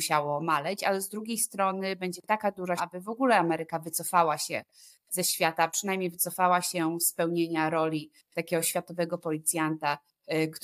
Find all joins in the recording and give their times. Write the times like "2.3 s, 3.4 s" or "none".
2.8 s